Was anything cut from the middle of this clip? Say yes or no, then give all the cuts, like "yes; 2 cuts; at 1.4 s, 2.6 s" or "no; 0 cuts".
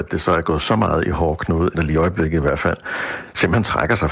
yes; 1 cut; at 1.7 s